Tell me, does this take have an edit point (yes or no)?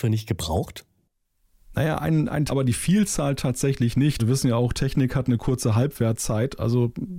yes